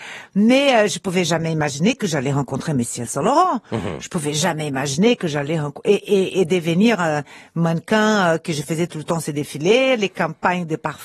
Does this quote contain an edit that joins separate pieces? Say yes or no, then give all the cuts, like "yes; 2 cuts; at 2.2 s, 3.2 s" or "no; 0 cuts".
no; 0 cuts